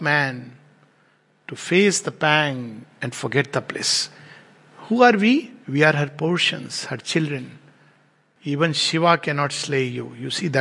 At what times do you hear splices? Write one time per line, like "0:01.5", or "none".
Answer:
0:08.4